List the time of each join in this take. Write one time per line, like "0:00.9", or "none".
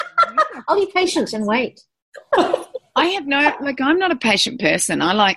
none